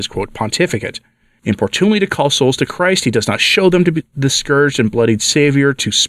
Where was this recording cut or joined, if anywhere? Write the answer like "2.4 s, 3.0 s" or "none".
1.4 s